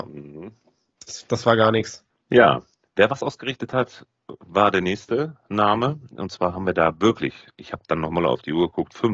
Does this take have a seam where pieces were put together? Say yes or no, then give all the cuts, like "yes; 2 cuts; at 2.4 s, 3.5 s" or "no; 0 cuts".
yes; 1 cut; at 2.1 s